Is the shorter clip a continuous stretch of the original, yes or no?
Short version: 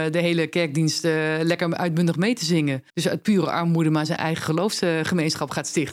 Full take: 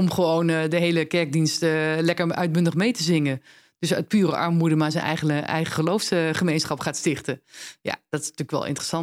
no